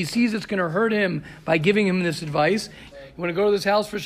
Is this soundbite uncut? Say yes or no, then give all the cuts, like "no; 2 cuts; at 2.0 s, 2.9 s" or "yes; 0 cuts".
no; 1 cut; at 2.9 s